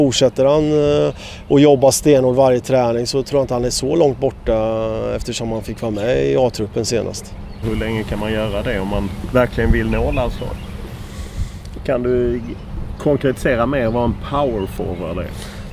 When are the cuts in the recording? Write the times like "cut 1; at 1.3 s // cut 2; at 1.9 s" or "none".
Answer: cut 1; at 7.6 s // cut 2; at 11.8 s